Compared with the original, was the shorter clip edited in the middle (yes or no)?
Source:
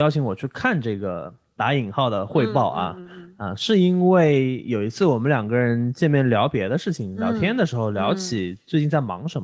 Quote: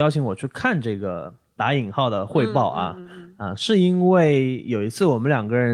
no